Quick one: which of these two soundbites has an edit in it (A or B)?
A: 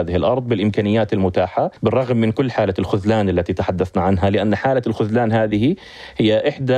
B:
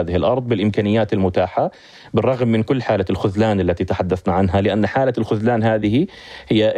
A